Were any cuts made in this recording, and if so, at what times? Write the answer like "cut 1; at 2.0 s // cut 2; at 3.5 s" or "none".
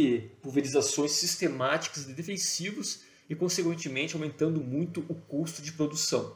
none